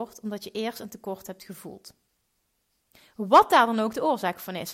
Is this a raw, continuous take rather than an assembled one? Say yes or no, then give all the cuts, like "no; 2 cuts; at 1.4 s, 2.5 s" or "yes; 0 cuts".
yes; 0 cuts